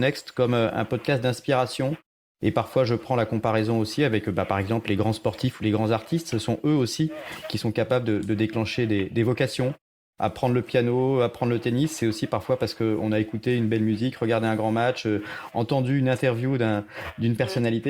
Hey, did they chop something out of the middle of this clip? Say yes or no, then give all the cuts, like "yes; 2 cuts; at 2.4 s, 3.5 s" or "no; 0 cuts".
no; 0 cuts